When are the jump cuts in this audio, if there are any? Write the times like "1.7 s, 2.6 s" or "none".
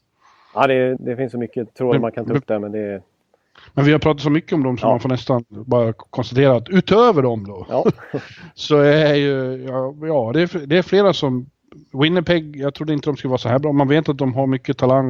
1.0 s